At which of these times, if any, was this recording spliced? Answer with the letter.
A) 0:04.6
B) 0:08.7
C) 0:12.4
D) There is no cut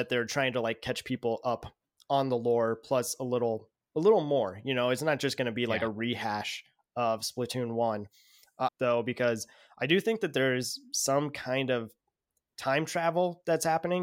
B